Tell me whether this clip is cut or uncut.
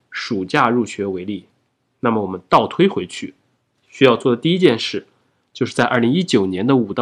uncut